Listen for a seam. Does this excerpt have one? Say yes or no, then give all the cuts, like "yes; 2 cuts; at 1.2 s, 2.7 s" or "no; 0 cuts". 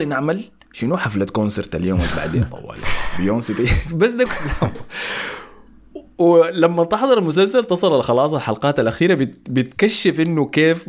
yes; 1 cut; at 4.3 s